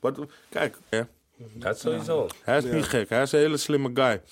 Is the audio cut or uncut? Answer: cut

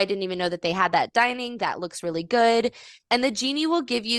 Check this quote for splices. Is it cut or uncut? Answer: uncut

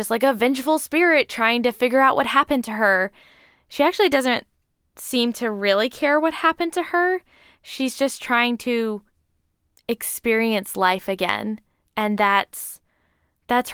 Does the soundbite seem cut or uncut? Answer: uncut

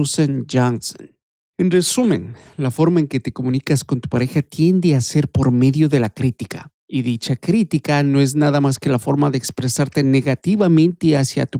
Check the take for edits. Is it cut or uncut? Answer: uncut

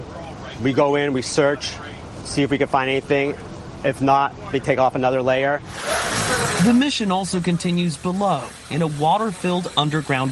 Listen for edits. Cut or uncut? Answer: uncut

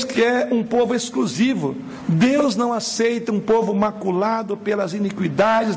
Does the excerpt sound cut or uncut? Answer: uncut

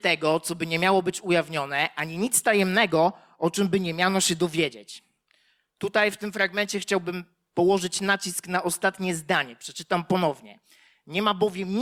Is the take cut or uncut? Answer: uncut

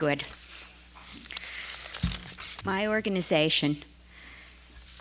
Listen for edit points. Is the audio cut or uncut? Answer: cut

